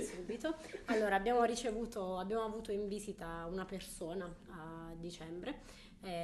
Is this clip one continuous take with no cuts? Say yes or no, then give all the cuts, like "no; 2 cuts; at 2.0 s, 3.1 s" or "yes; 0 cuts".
yes; 0 cuts